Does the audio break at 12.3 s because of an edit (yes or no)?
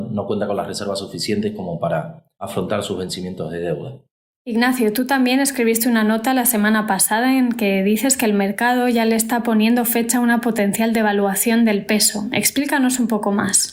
no